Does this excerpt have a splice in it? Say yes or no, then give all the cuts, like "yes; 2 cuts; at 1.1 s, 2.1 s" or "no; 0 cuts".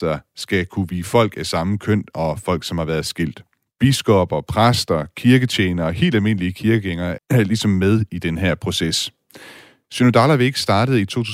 yes; 2 cuts; at 3.6 s, 7.2 s